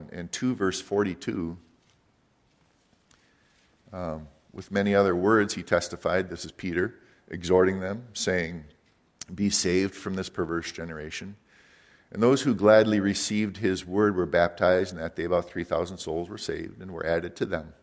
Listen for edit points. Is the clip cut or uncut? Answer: uncut